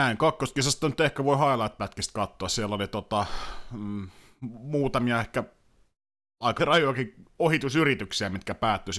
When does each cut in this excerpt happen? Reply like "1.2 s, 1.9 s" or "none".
6.6 s